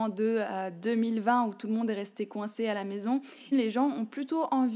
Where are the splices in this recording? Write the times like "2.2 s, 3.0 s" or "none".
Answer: 3.5 s